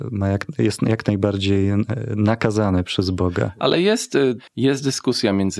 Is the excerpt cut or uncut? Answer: cut